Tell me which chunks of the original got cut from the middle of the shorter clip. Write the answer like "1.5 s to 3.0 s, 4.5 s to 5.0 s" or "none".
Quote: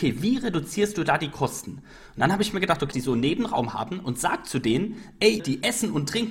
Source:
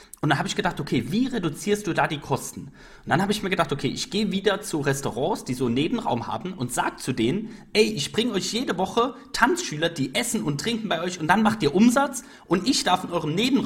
3.8 s to 5.4 s, 7.9 s to 9.9 s